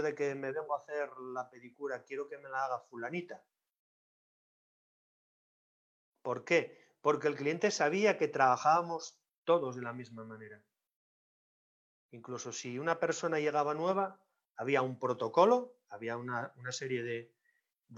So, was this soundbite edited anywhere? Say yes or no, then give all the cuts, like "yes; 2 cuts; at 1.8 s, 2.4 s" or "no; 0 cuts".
no; 0 cuts